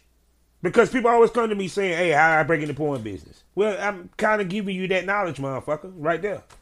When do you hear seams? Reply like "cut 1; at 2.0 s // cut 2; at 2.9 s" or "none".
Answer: none